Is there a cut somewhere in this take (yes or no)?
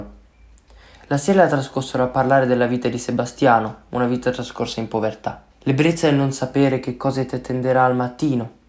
yes